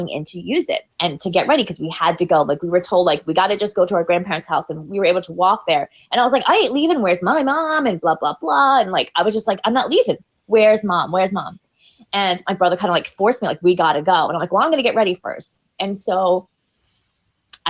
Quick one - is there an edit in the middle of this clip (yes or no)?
yes